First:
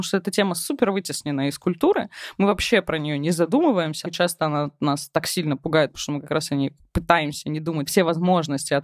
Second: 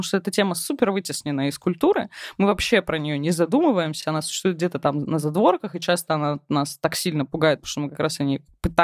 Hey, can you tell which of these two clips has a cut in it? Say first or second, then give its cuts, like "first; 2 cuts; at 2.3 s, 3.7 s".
first; 2 cuts; at 4.0 s, 7.9 s